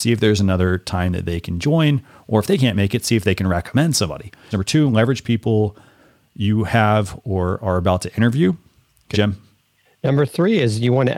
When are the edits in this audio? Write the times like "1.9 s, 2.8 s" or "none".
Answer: 4.5 s, 9.1 s